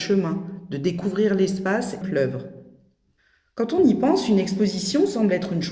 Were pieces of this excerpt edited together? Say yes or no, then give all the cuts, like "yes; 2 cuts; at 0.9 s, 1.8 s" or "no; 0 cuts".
yes; 1 cut; at 2.0 s